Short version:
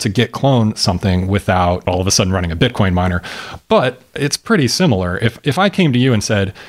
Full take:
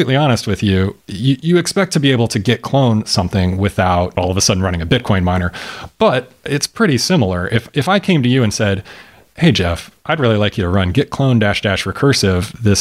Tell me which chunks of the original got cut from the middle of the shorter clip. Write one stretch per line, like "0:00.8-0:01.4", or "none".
none